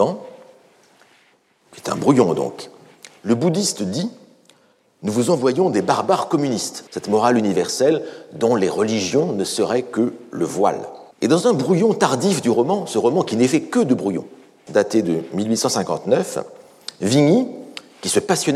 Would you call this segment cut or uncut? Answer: cut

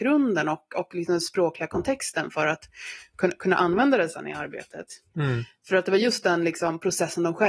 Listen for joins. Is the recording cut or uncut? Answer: cut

